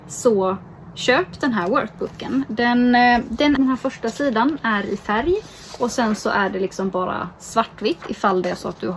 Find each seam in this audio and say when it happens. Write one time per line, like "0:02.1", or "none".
0:03.6